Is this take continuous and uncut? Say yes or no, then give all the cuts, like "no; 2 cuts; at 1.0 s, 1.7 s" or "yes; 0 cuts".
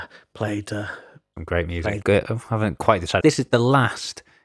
no; 2 cuts; at 2.0 s, 3.2 s